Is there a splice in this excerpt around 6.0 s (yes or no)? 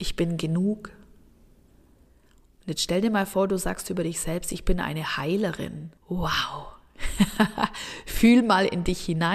yes